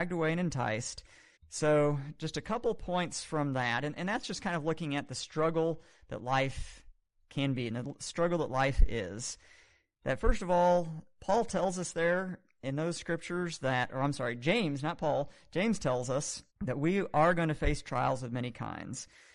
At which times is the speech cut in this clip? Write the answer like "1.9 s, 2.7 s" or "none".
1.4 s, 16.5 s